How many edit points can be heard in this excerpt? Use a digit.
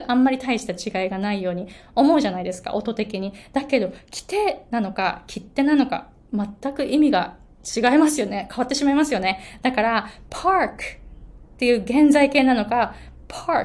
0